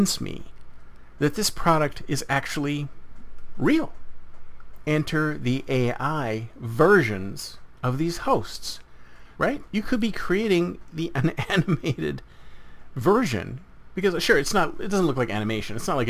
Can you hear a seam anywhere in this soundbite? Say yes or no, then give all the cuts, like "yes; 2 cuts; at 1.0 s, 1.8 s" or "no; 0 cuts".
yes; 2 cuts; at 4.8 s, 9.3 s